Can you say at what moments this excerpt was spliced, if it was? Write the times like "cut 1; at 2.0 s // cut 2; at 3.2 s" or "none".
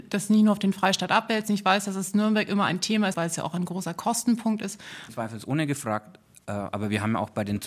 cut 1; at 3.1 s // cut 2; at 5.1 s